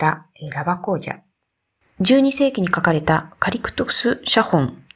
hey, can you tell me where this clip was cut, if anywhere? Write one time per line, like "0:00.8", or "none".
0:01.8